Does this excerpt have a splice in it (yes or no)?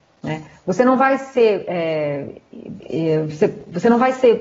no